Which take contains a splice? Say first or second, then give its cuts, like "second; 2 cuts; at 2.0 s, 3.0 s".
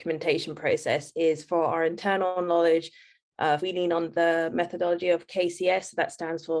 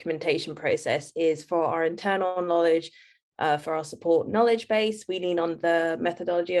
first; 1 cut; at 3.6 s